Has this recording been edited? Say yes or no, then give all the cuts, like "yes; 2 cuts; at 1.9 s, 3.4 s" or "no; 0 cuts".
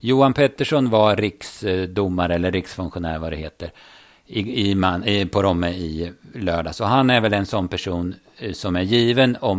no; 0 cuts